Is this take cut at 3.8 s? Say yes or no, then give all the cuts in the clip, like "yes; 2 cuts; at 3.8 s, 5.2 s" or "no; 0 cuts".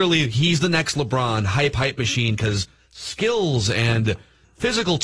no; 1 cut; at 1.7 s